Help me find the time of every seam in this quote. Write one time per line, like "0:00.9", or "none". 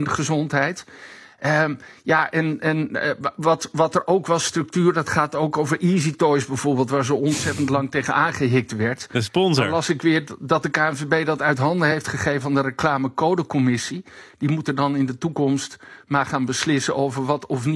none